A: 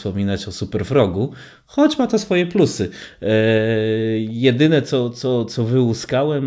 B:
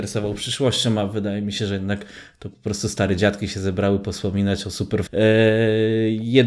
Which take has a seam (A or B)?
B